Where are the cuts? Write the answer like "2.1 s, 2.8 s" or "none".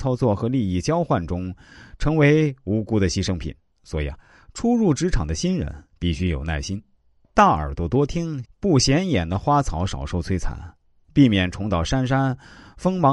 3.7 s, 8.4 s